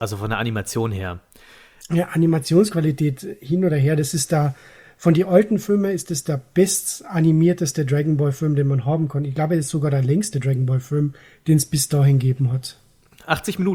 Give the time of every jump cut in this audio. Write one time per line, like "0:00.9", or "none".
none